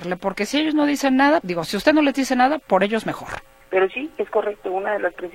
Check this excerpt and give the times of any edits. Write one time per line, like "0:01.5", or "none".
0:01.4
0:03.6